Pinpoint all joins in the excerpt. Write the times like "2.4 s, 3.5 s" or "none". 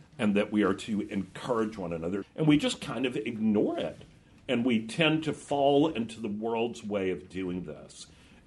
2.2 s